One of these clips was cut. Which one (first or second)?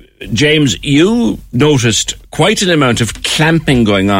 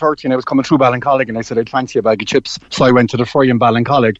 second